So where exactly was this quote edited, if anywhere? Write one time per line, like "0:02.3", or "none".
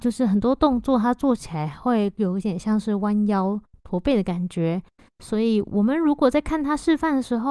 none